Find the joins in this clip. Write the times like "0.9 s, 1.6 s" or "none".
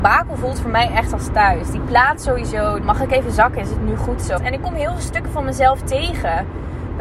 2.8 s, 4.4 s